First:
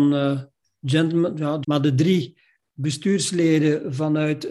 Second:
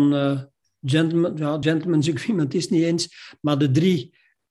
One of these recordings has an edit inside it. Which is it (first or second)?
first